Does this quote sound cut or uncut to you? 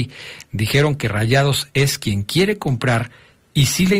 uncut